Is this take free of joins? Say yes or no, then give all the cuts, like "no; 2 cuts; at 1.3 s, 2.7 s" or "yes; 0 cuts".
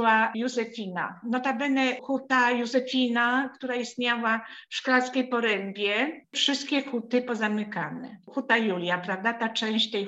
no; 2 cuts; at 1.2 s, 6.2 s